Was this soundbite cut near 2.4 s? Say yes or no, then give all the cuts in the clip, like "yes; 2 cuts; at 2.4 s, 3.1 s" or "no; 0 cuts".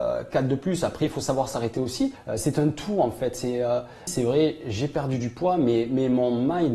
no; 1 cut; at 4.1 s